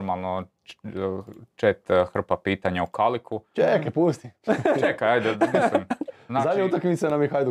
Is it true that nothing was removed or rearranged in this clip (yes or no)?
yes